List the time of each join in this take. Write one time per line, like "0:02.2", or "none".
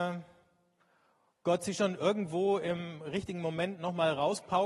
none